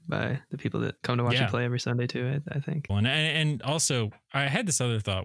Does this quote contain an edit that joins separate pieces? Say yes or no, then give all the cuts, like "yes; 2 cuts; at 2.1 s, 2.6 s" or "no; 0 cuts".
yes; 1 cut; at 2.9 s